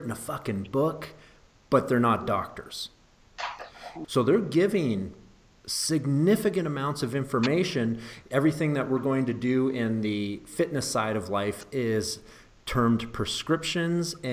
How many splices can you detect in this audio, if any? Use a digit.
2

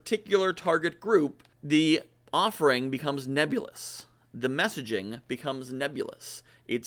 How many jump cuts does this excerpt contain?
1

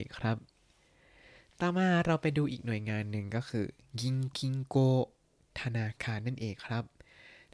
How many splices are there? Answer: 1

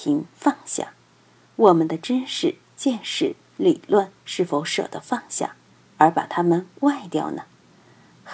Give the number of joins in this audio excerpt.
1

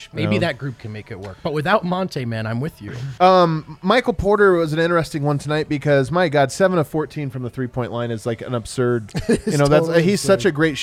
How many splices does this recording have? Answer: 1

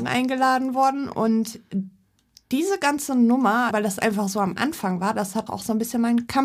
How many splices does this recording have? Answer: 2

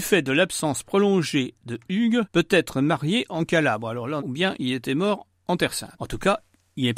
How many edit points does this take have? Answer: 1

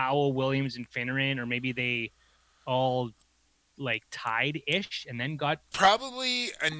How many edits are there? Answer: 1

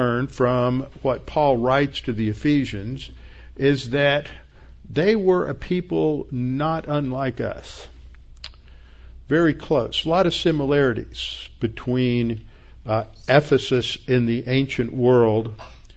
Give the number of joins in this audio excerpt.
0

